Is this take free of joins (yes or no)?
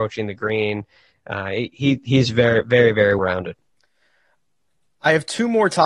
no